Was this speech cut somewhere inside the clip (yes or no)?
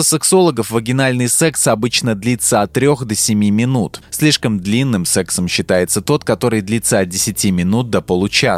no